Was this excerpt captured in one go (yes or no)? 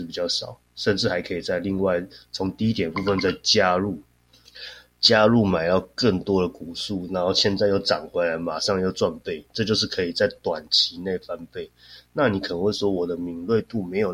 yes